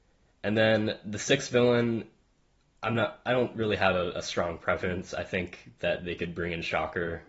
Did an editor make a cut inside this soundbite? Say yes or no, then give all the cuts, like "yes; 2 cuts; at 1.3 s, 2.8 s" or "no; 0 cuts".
no; 0 cuts